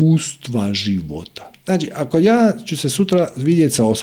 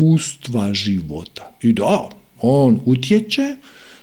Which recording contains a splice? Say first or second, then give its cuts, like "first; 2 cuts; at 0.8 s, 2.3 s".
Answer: first; 1 cut; at 1.5 s